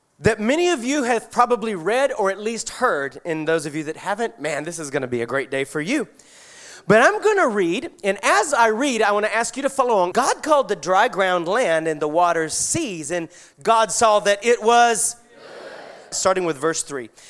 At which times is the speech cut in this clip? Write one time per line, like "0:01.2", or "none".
0:10.1
0:16.1